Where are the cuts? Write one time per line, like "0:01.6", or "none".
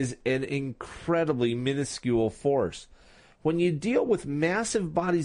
none